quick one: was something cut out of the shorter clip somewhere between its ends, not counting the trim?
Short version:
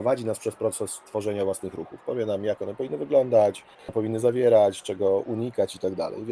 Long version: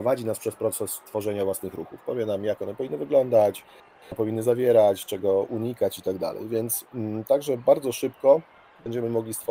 yes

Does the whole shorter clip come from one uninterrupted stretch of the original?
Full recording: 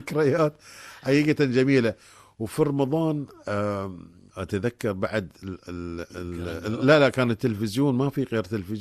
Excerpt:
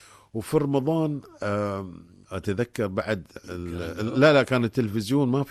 no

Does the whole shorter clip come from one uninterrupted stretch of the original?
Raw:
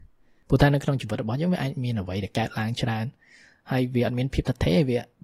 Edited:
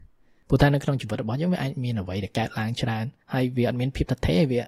no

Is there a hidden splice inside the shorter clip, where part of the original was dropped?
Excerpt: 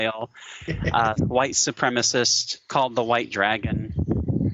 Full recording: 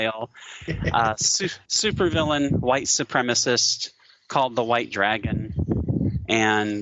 yes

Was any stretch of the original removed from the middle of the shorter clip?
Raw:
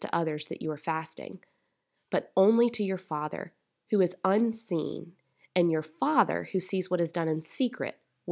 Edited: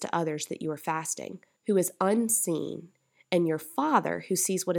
yes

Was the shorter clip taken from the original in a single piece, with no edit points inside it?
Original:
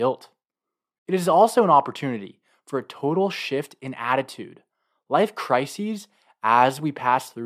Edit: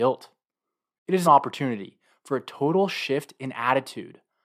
no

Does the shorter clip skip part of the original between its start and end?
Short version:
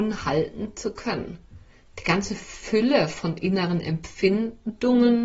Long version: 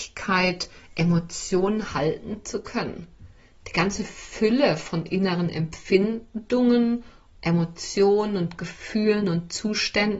no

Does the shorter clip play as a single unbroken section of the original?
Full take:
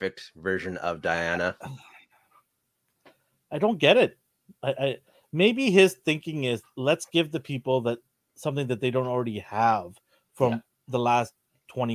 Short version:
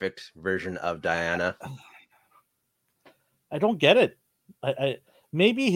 yes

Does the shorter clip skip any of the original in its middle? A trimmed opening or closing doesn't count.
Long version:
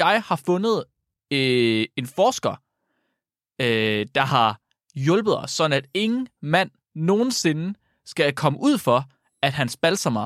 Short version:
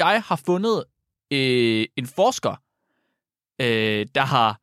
no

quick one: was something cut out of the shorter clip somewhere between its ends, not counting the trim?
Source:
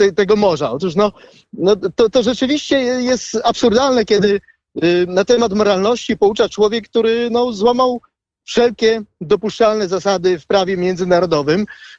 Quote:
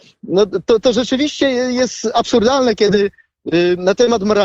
no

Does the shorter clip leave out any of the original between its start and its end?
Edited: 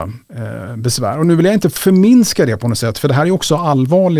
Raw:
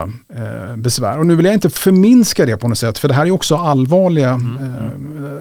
no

